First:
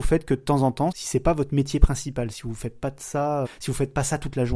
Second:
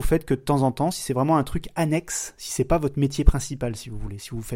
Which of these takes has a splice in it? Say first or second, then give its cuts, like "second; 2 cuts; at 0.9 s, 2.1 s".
first; 3 cuts; at 0.9 s, 2.3 s, 3.5 s